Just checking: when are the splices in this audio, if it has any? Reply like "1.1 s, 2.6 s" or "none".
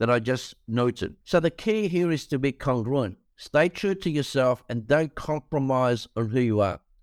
1.2 s